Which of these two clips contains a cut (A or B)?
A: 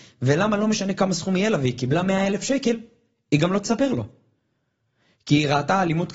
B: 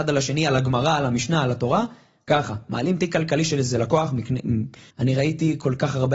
B